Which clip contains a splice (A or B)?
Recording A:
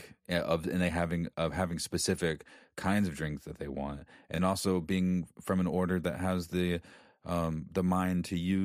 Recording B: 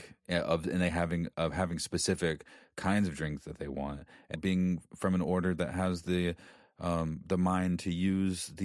B